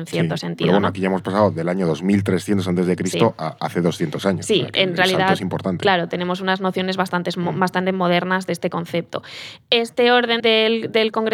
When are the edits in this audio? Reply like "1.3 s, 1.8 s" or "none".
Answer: 10.4 s